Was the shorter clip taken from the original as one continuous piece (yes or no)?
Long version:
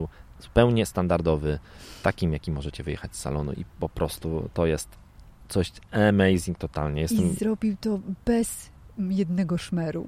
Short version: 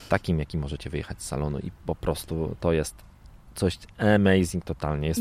yes